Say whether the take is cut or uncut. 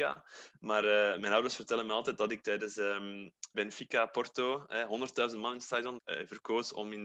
cut